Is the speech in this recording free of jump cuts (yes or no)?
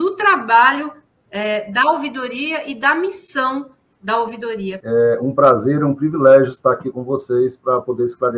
no